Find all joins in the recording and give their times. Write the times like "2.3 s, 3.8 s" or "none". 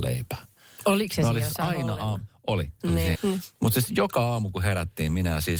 3.2 s